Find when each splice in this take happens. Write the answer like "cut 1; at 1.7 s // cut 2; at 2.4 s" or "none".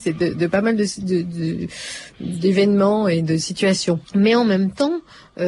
cut 1; at 4.0 s